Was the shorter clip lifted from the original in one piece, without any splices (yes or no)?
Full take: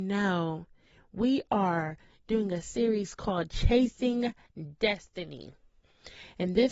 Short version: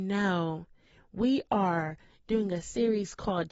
yes